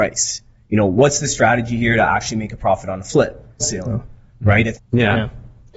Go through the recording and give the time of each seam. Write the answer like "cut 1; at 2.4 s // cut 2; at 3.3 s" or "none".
cut 1; at 3.6 s // cut 2; at 4.7 s